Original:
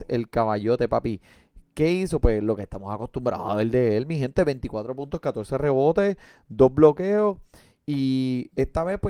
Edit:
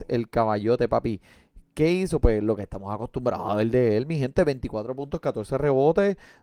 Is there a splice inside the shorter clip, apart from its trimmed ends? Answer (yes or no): no